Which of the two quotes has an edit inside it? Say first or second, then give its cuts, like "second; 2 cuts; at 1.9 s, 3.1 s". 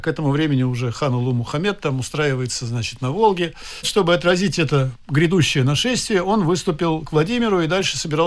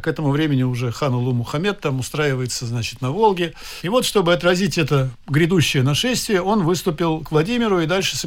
first; 1 cut; at 3.8 s